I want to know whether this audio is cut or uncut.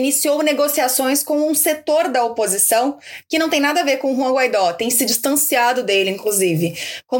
uncut